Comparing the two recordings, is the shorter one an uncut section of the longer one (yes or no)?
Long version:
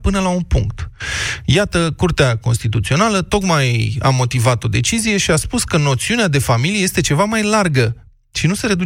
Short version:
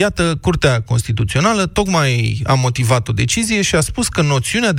yes